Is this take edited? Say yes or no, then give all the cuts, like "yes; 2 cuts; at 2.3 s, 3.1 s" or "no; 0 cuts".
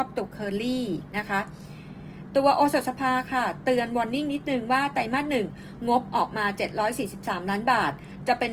no; 0 cuts